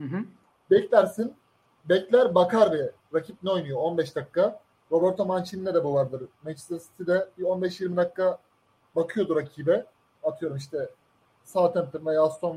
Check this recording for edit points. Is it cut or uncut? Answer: uncut